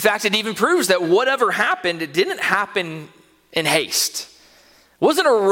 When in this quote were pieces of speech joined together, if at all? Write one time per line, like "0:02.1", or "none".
none